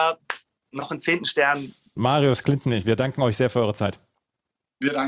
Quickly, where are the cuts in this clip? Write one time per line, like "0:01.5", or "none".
0:02.0